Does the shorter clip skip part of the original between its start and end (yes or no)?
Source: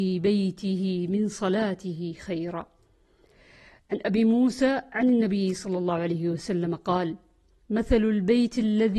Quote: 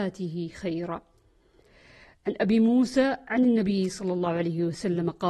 no